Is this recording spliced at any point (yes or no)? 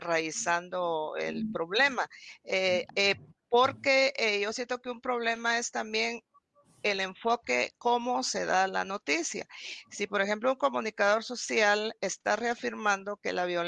yes